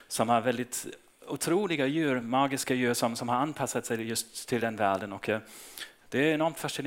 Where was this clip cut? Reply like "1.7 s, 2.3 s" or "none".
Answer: none